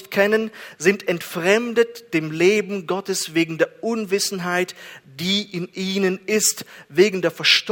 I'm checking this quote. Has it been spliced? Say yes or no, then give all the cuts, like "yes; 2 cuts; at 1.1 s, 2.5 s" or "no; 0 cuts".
no; 0 cuts